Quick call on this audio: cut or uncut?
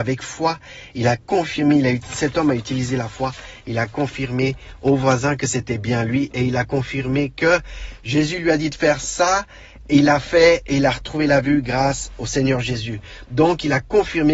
uncut